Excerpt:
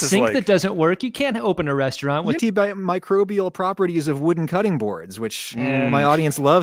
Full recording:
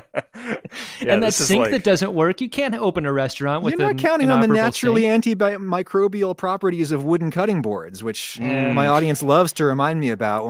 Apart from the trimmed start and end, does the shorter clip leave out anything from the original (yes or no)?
yes